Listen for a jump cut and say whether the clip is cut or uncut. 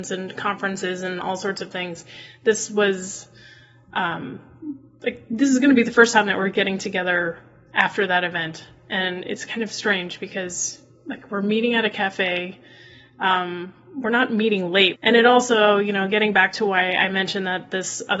cut